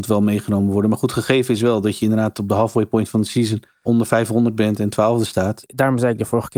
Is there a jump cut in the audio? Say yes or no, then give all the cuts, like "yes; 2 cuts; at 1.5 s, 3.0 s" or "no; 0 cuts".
yes; 2 cuts; at 3.8 s, 5.6 s